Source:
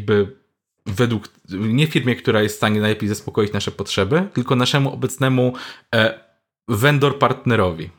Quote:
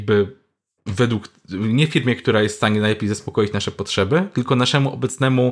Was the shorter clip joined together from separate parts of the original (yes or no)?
no